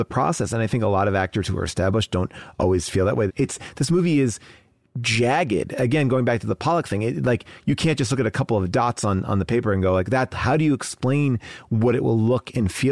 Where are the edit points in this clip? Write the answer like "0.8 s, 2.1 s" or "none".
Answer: 3.3 s, 10.3 s